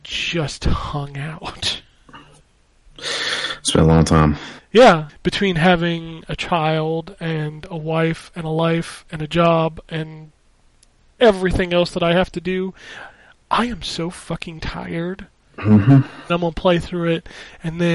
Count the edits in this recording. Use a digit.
2